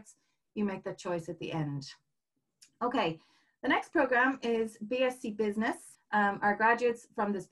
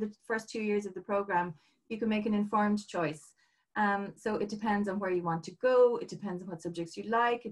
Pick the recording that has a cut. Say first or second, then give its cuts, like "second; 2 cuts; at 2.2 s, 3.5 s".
first; 1 cut; at 5.9 s